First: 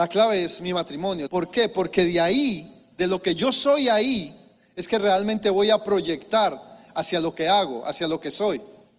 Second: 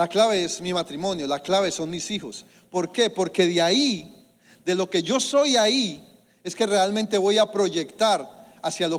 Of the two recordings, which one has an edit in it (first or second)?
first